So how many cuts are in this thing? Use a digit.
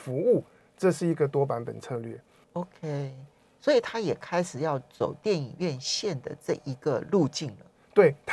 1